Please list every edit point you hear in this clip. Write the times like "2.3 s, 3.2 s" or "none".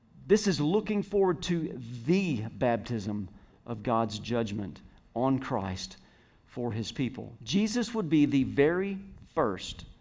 7.4 s